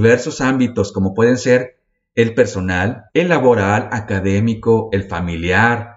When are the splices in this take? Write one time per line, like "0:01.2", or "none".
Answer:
0:03.1